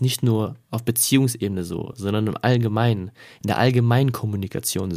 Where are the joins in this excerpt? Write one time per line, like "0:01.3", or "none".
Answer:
none